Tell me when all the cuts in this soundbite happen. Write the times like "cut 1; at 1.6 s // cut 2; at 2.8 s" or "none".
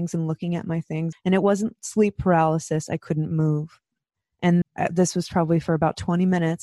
cut 1; at 1.1 s // cut 2; at 2.9 s // cut 3; at 4.6 s